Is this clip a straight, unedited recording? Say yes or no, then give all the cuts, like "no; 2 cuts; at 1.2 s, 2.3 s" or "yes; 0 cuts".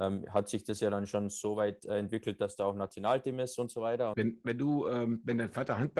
no; 1 cut; at 4.1 s